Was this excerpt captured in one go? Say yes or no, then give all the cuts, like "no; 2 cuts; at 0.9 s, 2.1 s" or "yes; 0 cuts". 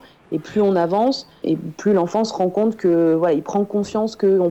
no; 1 cut; at 1.4 s